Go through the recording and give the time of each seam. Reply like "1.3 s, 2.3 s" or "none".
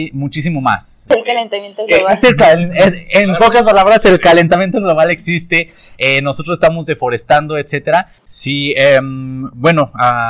1.1 s, 8.2 s